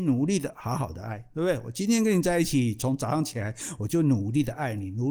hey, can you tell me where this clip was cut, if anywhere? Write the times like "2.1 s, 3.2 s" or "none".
none